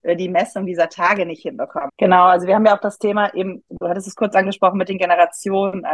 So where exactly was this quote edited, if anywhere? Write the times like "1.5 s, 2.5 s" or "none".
1.9 s